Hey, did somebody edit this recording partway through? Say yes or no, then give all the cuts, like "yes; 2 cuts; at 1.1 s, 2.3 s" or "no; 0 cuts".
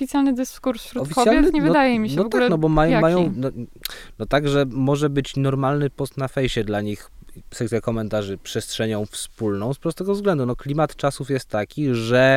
no; 0 cuts